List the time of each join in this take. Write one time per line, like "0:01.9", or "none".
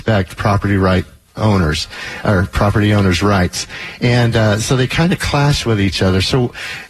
none